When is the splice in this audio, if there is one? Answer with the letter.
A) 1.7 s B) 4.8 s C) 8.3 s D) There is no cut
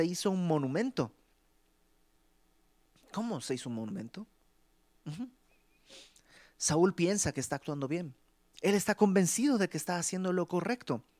D